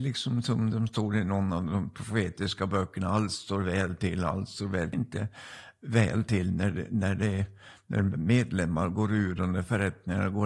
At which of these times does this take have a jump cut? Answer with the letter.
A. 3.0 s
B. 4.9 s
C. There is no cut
B